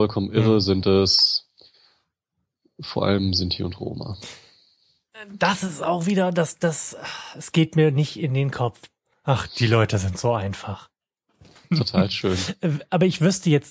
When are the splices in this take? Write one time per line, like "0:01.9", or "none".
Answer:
0:09.1
0:11.6